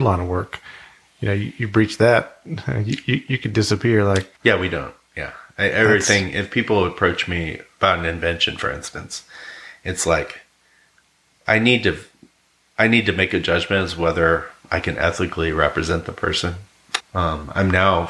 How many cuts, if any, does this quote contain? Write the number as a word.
two